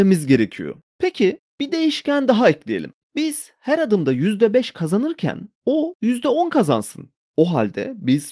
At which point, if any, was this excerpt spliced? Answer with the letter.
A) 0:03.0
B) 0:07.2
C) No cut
A